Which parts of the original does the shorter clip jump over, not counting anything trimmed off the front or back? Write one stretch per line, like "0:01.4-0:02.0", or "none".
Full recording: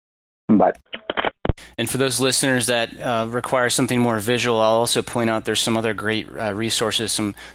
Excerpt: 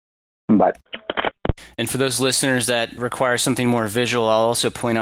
0:03.0-0:03.3